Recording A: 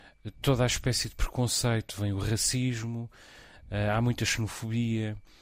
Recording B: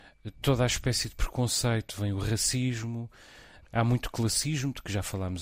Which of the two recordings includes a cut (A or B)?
B